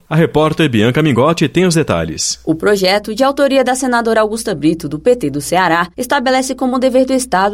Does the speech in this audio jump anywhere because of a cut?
no; 0 cuts

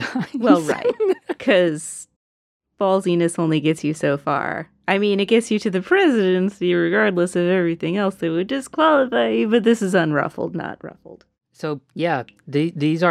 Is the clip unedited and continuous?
no; 1 cut; at 2.2 s

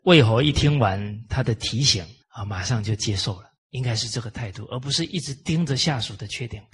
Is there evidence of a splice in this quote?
yes; 2 cuts; at 2.2 s, 3.6 s

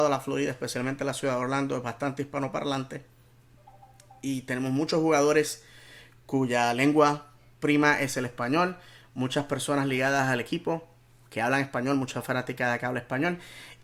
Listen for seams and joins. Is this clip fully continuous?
yes; 0 cuts

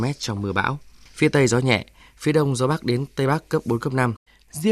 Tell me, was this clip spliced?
no; 0 cuts

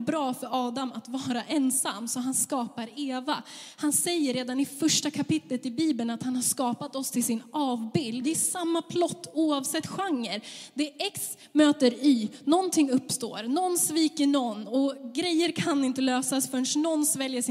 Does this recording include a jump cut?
yes; 1 cut; at 8.2 s

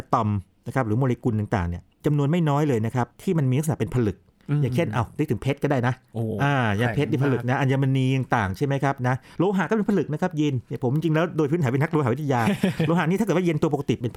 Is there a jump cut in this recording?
no; 0 cuts

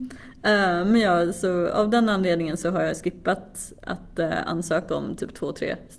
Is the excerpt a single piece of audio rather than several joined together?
yes; 0 cuts

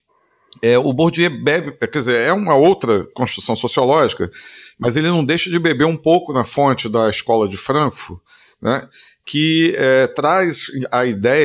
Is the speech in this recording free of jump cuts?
yes; 0 cuts

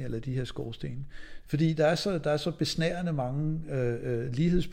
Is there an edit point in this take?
yes; 1 cut; at 1.4 s

